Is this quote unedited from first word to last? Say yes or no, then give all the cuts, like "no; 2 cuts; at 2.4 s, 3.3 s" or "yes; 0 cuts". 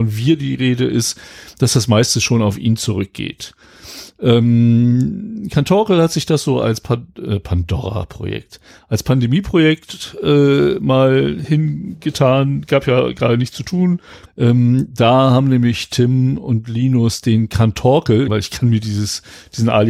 no; 2 cuts; at 14.3 s, 18.3 s